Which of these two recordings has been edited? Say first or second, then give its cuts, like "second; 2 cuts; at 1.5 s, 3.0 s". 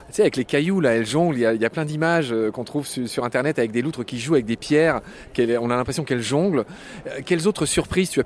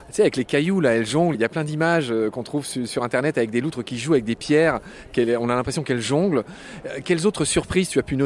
second; 1 cut; at 1.3 s